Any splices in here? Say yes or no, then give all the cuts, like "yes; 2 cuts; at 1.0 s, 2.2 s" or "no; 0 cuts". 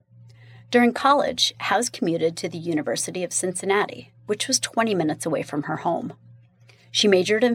no; 0 cuts